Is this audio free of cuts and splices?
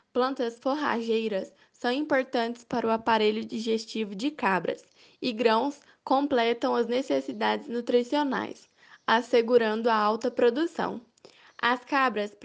yes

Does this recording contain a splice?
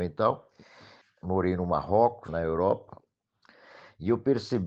yes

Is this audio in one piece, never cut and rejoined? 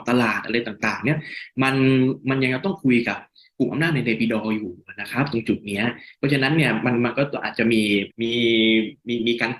no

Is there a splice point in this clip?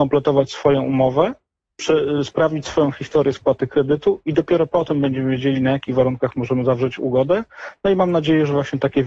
no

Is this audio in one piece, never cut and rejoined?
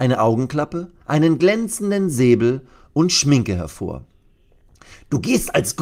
no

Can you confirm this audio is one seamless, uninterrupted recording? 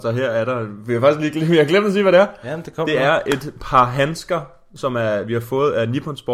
yes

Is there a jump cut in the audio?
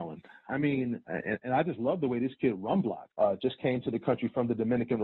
yes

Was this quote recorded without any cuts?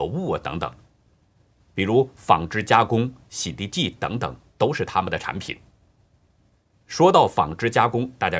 yes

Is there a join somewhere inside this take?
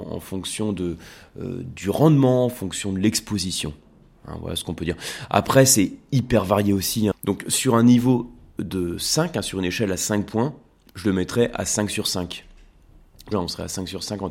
yes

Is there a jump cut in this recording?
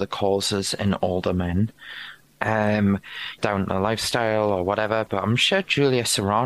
yes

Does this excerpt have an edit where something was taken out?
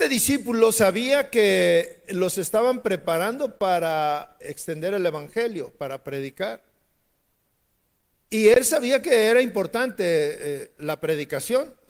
yes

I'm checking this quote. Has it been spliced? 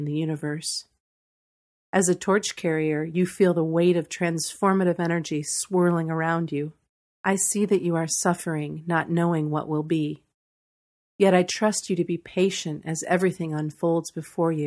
yes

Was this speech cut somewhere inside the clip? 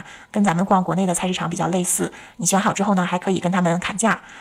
yes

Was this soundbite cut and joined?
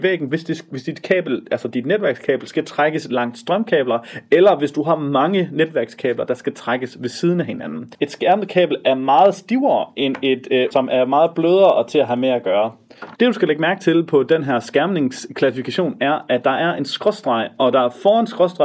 yes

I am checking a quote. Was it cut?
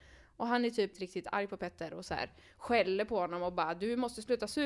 yes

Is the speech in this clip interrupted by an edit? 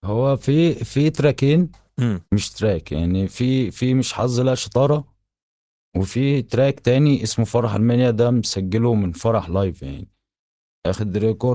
yes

